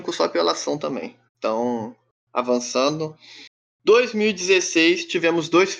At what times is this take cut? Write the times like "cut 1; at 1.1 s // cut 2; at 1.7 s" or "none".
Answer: cut 1; at 1.3 s